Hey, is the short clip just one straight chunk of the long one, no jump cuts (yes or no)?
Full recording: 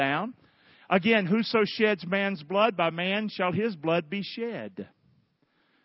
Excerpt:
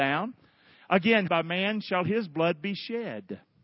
no